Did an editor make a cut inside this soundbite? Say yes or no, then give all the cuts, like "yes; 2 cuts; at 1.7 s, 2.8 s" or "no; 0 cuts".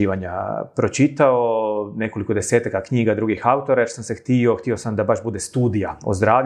no; 0 cuts